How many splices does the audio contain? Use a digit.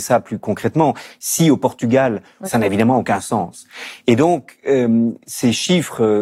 1